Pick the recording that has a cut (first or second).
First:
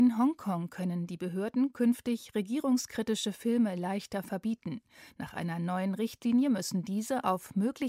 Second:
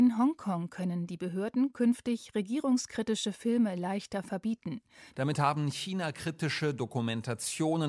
second